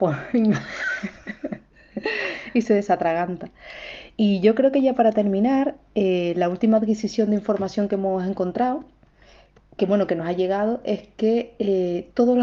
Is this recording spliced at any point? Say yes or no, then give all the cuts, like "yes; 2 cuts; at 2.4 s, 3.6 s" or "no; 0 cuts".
no; 0 cuts